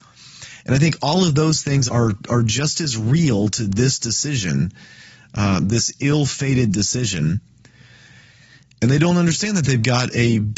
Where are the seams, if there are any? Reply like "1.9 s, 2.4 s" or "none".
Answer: 1.9 s